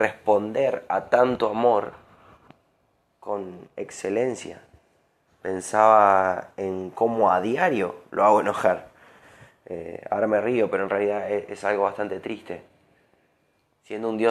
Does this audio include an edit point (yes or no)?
yes